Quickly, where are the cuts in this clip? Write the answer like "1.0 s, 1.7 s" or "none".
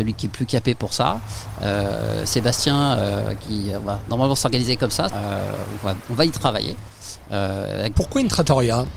5.1 s, 7.9 s